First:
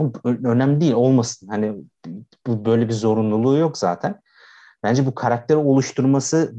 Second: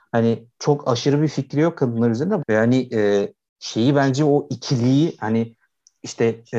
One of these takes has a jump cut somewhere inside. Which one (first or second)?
second